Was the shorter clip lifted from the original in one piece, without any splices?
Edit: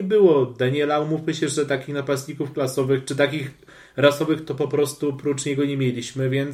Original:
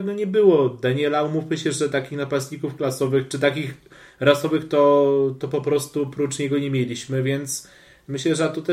no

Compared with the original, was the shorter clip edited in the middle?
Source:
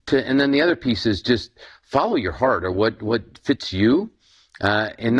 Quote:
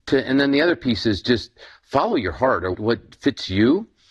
yes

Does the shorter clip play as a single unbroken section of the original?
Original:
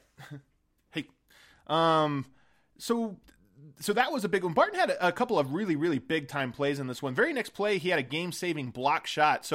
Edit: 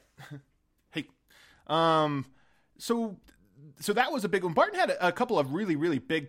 yes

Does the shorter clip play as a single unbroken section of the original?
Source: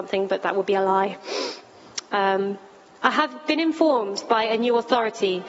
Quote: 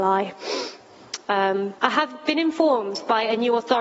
no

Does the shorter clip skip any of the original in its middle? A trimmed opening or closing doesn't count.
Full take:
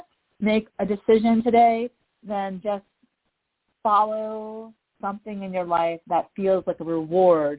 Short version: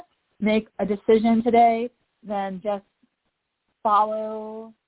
no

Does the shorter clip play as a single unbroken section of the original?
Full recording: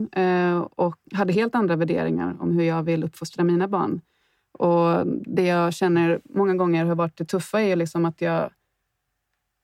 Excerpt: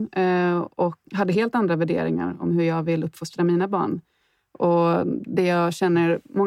yes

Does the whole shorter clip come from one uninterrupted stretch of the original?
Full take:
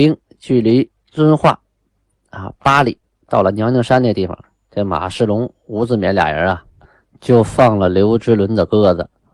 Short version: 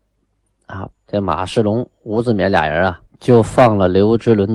no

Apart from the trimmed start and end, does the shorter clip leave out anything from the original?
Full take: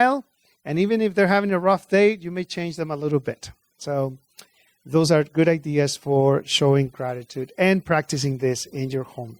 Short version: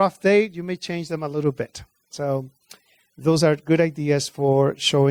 no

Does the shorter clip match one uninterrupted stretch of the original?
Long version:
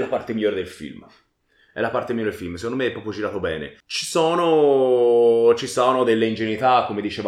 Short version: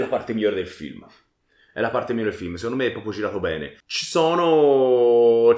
yes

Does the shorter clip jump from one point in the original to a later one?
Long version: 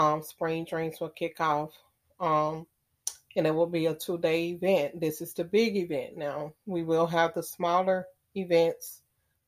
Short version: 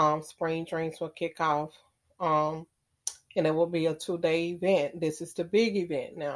no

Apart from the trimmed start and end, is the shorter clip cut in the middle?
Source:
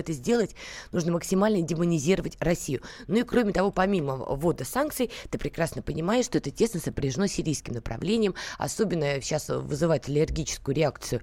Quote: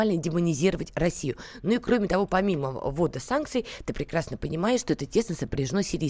no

